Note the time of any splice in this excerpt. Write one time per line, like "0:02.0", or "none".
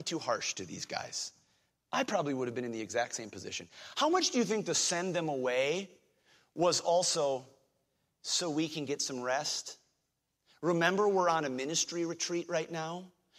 none